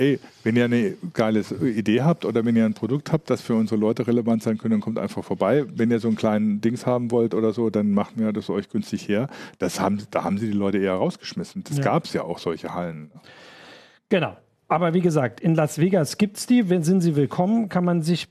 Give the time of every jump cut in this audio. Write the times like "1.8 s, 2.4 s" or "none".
none

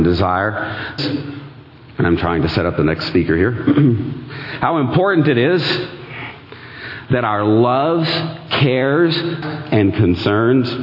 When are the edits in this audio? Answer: 1.0 s, 9.4 s

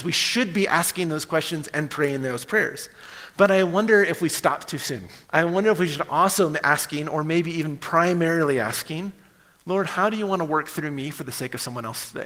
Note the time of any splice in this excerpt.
5.2 s

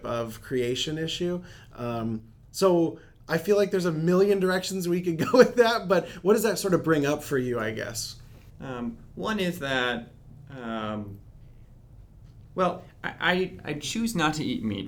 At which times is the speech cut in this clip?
8.5 s

